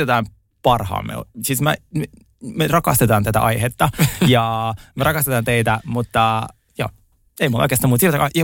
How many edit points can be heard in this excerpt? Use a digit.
0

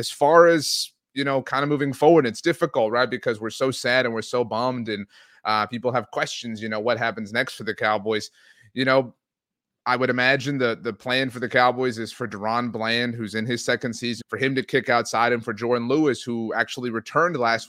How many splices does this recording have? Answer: 1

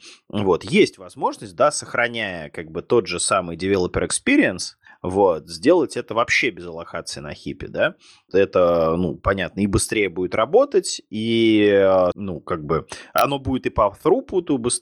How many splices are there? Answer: 2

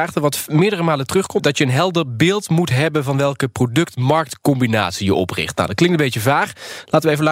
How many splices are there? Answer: 1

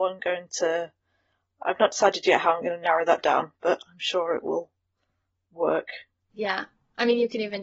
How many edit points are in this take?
1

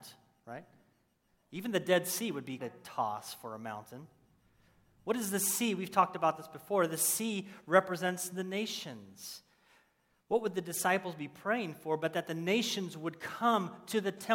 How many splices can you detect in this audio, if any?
1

